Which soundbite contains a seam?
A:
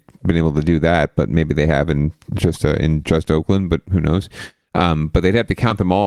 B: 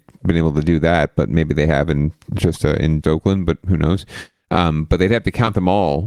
B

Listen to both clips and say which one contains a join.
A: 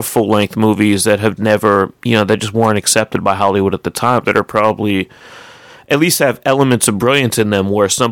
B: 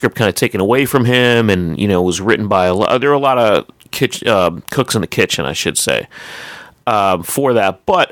A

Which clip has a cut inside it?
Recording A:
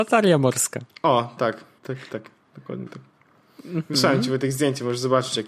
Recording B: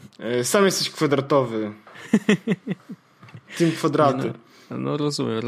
A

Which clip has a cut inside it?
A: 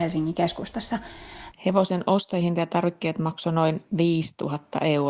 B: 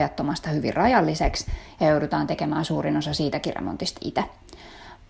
A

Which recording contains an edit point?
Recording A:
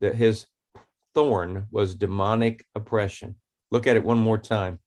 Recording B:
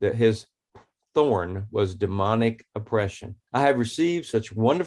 B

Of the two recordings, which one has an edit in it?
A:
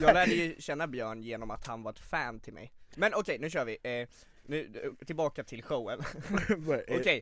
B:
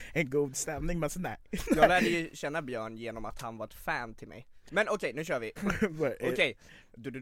B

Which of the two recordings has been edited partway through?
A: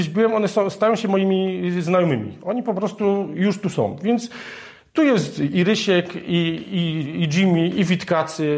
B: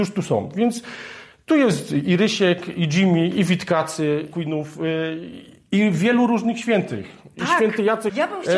B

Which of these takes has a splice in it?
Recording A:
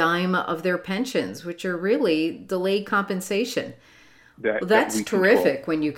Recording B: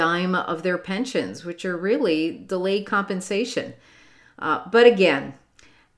A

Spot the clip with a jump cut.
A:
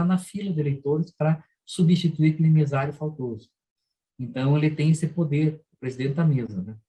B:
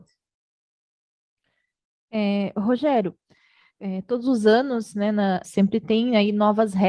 B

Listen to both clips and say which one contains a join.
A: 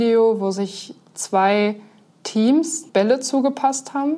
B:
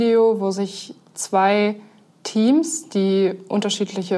A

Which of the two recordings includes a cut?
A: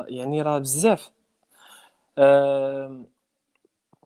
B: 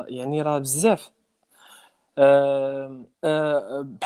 B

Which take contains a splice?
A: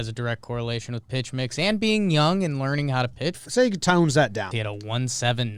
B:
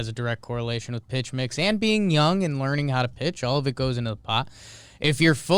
A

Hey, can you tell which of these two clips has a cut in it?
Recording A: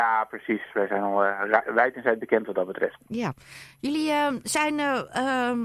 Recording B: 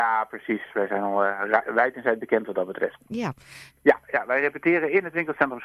B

